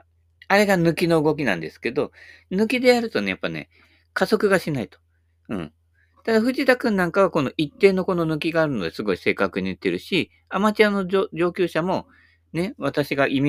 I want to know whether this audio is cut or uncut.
uncut